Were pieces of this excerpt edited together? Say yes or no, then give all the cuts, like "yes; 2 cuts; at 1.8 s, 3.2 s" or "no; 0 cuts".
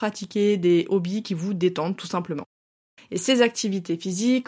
yes; 1 cut; at 3.0 s